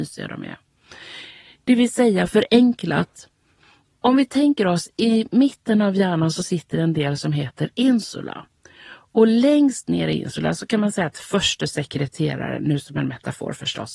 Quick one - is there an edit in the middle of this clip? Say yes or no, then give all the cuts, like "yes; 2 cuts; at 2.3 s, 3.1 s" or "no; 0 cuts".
no; 0 cuts